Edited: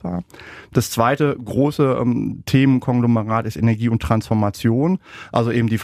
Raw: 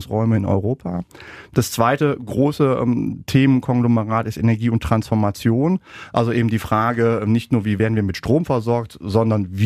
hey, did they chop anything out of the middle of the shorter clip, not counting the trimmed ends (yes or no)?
no